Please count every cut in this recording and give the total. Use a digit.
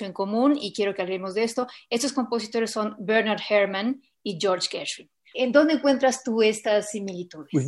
1